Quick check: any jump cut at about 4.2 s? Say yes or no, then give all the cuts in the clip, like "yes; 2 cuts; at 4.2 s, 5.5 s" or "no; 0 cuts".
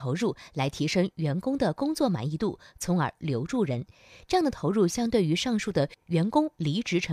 no; 0 cuts